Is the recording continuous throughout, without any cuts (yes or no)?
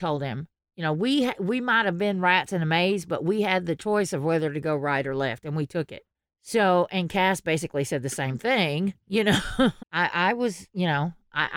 no